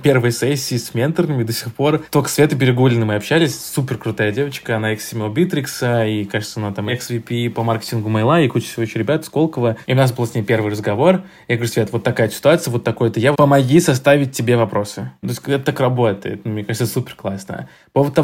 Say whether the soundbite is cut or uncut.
cut